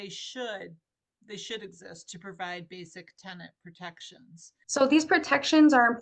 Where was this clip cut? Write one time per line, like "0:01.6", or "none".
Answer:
0:04.6